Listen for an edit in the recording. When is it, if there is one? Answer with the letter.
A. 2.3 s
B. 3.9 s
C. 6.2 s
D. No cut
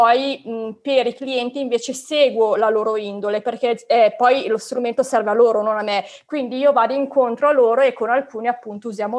D